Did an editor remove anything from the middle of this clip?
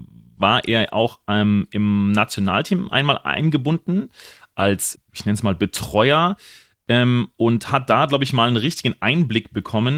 yes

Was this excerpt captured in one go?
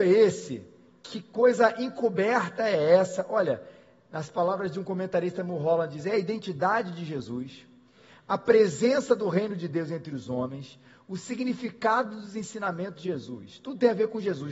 yes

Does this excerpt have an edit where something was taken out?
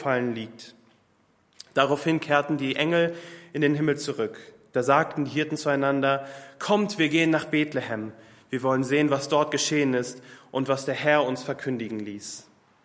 no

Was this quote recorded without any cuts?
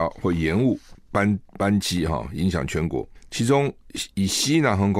yes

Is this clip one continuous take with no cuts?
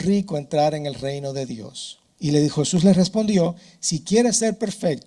no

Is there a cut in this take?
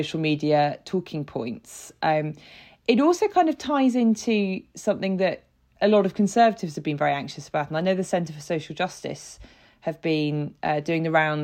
no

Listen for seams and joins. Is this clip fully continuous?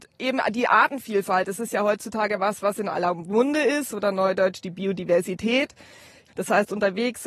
no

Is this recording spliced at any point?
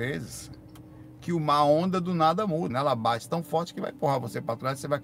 yes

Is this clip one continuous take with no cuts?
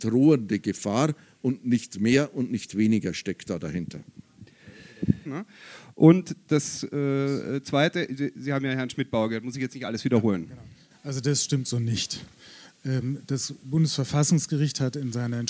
no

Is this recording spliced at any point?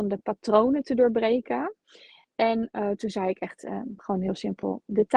no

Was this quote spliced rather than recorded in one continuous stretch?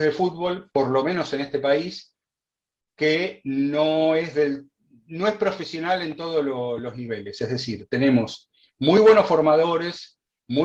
no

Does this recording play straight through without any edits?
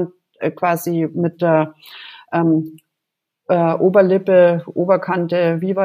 yes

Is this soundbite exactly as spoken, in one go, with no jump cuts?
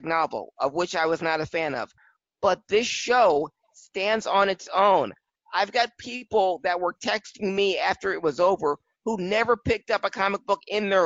yes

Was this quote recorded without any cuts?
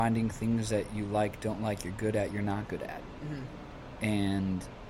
yes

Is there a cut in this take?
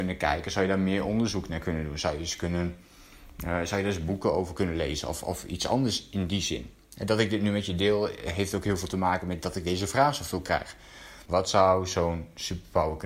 yes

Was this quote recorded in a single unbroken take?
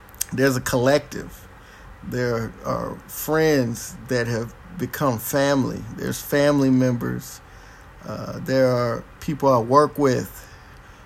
yes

